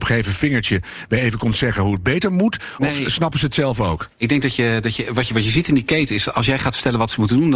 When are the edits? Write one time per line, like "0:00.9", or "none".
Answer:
none